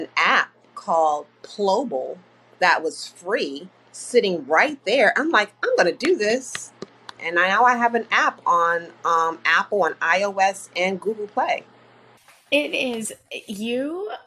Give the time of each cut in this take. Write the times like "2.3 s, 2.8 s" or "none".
7.2 s